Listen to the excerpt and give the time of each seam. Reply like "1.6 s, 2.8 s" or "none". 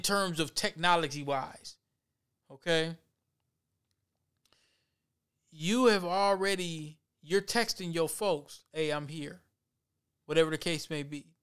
2.4 s